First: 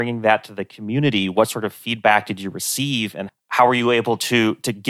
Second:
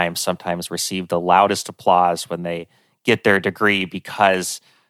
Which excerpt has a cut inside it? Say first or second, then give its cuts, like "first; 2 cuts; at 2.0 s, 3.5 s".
first; 1 cut; at 3.3 s